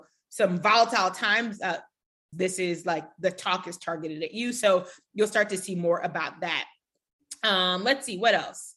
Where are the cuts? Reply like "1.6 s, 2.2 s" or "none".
2.3 s